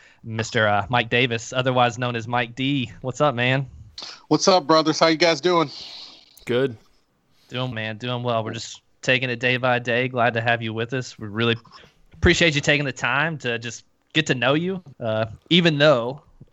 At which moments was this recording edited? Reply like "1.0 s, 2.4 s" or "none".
7.7 s, 14.9 s